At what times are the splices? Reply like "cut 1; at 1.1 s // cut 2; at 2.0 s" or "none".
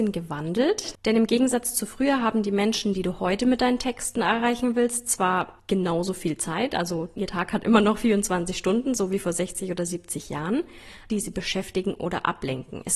cut 1; at 11.1 s

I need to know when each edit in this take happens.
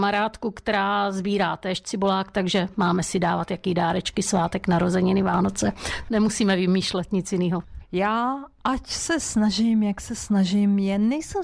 cut 1; at 7.8 s

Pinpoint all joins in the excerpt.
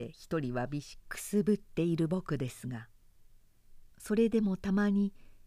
cut 1; at 1.0 s

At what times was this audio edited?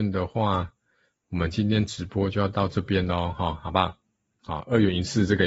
cut 1; at 4.4 s

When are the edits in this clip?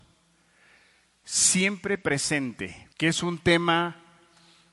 cut 1; at 2.9 s

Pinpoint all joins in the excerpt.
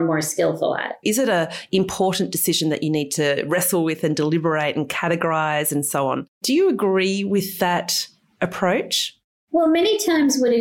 cut 1; at 1.0 s // cut 2; at 6.4 s

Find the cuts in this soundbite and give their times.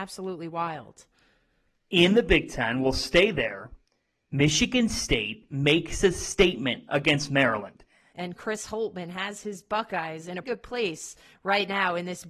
cut 1; at 8.1 s // cut 2; at 10.4 s

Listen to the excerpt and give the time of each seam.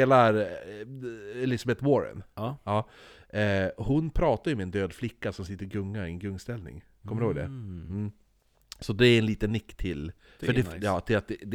none

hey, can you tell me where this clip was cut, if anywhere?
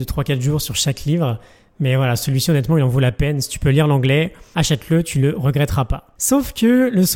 cut 1; at 6.2 s

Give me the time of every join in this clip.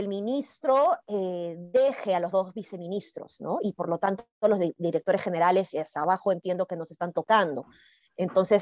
none

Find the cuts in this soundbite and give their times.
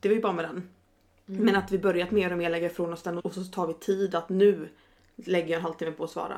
cut 1; at 3.2 s

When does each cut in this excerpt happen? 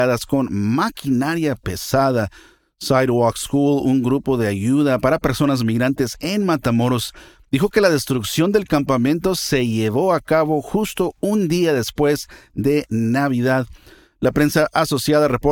none

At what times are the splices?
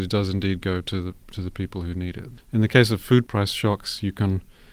cut 1; at 2.4 s

